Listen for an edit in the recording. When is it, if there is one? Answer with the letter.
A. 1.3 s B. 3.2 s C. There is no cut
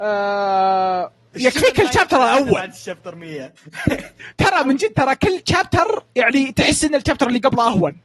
A